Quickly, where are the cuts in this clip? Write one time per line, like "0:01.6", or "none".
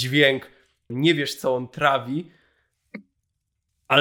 0:00.9